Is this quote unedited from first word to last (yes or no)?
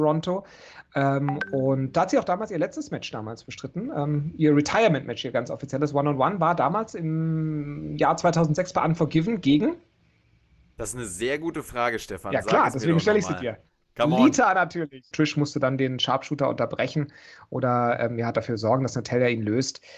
no